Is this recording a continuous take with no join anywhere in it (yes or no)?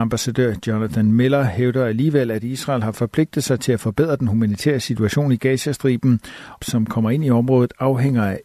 no